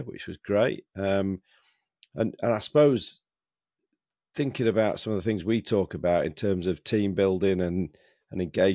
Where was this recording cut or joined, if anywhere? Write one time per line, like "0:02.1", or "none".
none

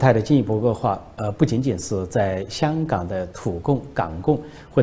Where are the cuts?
none

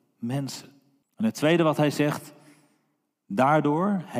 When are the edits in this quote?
0:01.0

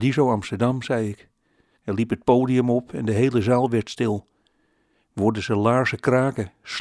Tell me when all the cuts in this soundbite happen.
0:01.8

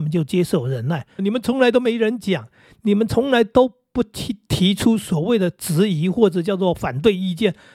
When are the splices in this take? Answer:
0:01.2

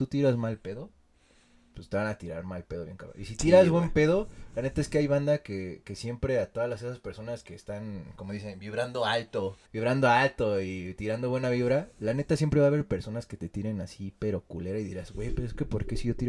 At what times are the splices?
0:09.6

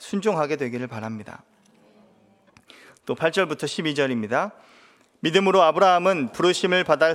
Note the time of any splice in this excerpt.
none

